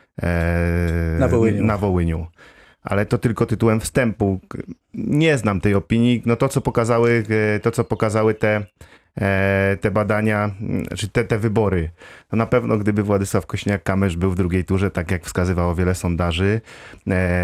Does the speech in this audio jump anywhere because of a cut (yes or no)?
no